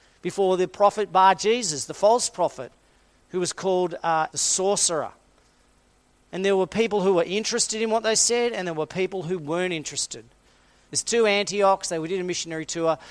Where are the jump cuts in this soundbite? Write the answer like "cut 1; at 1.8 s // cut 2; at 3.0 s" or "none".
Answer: cut 1; at 4.3 s // cut 2; at 10.9 s